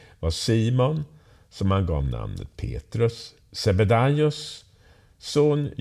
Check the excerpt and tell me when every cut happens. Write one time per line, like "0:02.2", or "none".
none